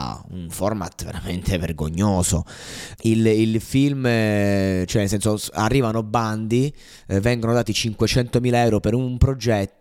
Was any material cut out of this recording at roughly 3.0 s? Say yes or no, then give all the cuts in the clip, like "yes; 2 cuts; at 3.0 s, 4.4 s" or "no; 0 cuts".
yes; 1 cut; at 3.0 s